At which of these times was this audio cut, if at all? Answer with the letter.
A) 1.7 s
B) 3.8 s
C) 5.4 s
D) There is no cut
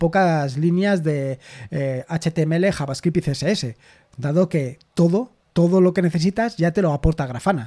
C